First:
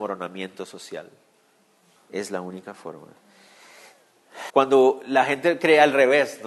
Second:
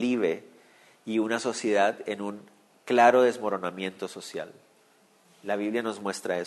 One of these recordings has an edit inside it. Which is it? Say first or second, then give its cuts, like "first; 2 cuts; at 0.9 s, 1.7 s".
first; 2 cuts; at 2.0 s, 4.5 s